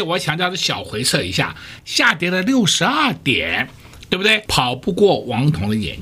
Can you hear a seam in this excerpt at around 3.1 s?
no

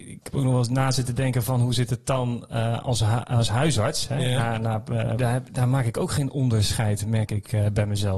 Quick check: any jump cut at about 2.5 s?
no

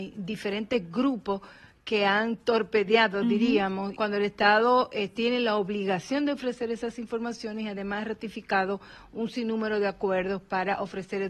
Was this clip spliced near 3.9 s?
yes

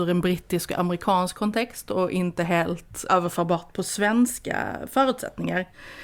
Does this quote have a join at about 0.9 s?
no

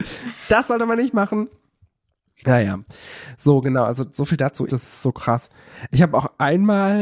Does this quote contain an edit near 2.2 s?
no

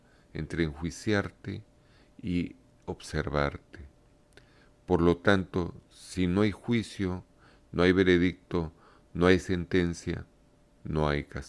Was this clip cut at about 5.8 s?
no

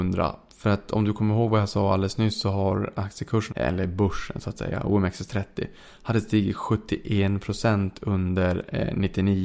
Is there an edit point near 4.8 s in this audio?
no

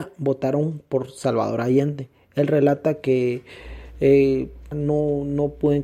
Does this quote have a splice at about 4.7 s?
yes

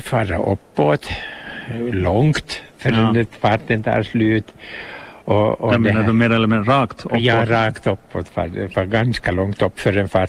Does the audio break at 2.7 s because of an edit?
yes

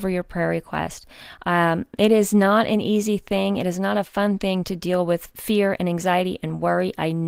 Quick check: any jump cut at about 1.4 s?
no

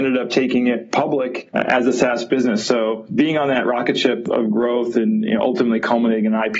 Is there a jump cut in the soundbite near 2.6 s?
no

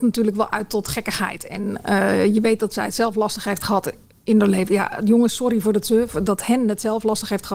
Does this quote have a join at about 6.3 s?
yes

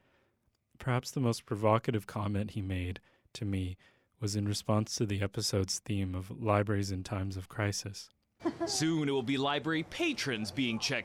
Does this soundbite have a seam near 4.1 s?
no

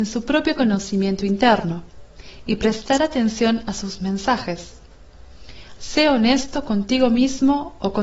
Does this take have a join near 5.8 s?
yes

